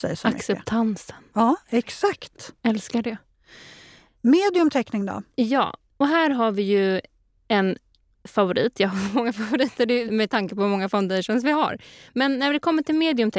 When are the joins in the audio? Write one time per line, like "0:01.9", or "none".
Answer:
0:10.1